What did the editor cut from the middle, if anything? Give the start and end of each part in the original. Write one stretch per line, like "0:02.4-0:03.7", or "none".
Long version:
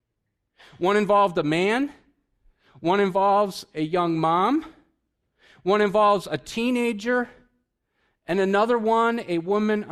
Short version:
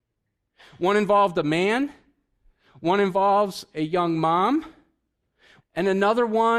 0:05.6-0:08.1